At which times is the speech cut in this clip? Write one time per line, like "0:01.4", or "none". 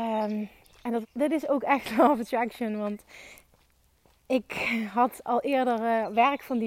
0:01.0